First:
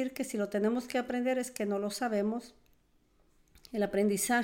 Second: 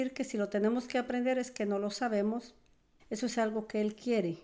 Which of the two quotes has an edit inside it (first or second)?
second